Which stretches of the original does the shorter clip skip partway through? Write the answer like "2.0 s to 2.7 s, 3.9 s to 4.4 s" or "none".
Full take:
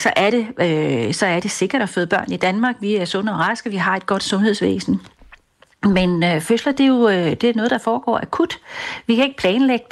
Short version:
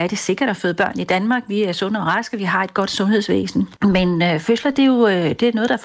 5.1 s to 5.8 s